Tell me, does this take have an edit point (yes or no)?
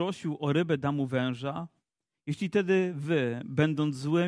no